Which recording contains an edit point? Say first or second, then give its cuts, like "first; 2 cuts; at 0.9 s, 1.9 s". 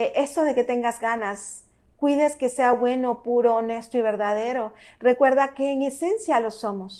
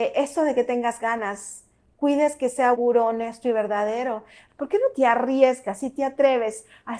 second; 2 cuts; at 2.7 s, 4.5 s